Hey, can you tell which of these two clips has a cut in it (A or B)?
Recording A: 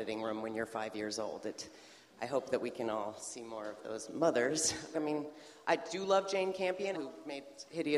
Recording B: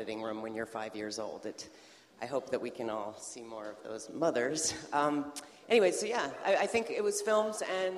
A